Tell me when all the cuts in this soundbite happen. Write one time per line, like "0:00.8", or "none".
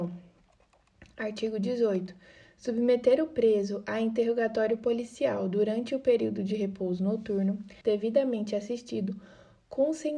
0:07.8